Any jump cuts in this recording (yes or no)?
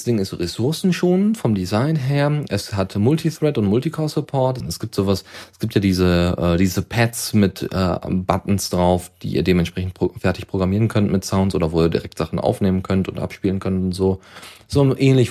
yes